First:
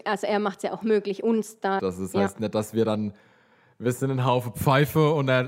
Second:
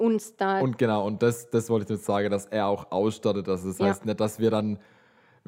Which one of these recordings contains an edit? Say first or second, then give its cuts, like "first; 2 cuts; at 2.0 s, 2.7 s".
first; 1 cut; at 1.8 s